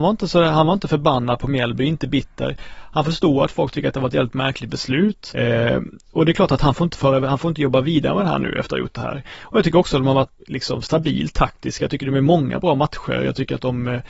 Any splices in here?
yes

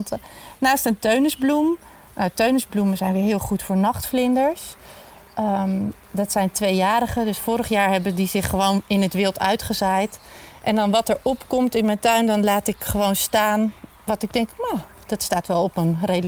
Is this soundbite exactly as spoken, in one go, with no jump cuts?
yes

